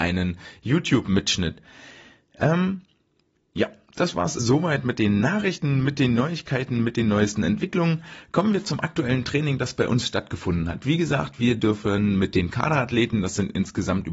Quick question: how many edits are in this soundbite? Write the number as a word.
one